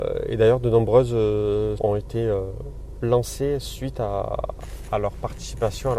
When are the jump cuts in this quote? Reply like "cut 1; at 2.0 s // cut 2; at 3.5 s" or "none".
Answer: cut 1; at 1.8 s